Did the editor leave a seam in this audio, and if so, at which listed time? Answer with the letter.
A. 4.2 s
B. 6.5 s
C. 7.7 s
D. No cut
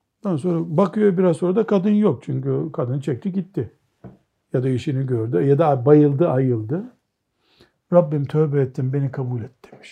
C